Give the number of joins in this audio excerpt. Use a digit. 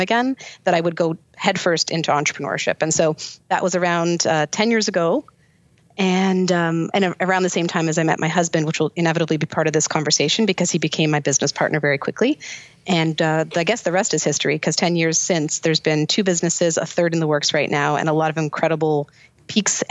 0